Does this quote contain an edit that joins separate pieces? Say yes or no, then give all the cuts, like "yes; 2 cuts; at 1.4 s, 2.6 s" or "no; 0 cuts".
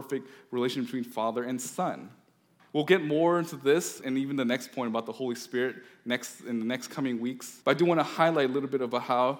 yes; 3 cuts; at 2.6 s, 4.0 s, 7.6 s